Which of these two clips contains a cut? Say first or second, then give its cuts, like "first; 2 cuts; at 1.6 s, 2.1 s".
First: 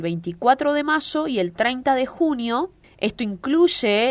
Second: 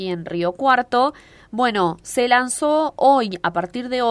first; 1 cut; at 2.8 s